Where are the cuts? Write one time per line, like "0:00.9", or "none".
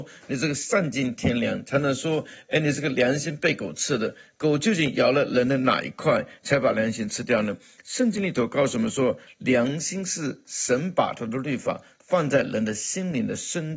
none